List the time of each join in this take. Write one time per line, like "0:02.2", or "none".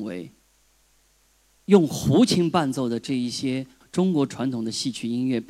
none